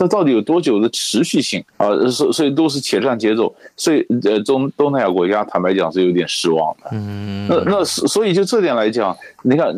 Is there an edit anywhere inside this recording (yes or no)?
yes